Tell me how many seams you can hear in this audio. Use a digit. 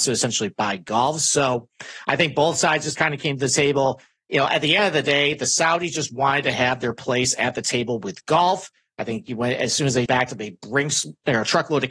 1